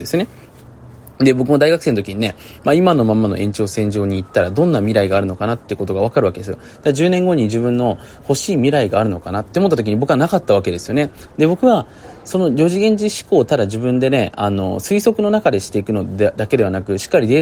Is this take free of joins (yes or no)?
no